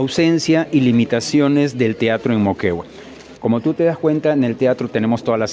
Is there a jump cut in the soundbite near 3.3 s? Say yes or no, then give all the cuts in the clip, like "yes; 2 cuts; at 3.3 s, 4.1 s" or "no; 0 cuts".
yes; 1 cut; at 3.3 s